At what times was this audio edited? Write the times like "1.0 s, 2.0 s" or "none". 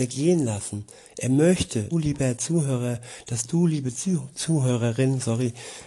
1.9 s, 3.9 s